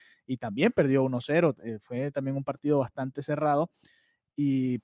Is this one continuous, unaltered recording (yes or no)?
yes